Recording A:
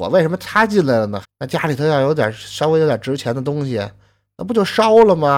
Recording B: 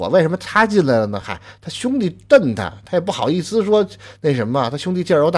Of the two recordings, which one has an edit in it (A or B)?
A